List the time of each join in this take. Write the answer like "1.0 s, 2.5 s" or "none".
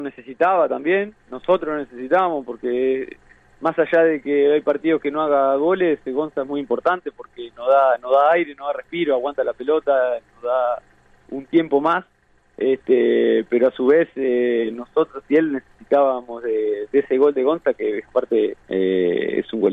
18.6 s